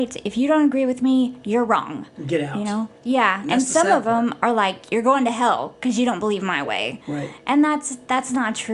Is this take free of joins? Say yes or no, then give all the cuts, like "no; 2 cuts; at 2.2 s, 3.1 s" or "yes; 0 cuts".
yes; 0 cuts